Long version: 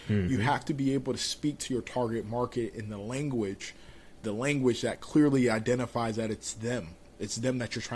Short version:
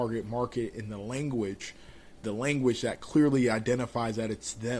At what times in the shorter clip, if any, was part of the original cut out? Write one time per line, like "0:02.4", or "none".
none